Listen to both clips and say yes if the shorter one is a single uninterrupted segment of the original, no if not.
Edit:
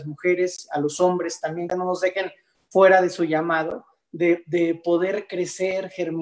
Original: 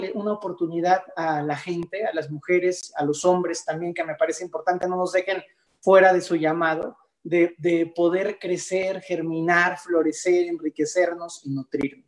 no